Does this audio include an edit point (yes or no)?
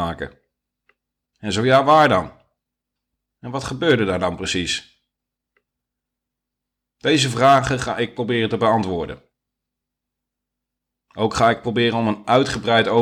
no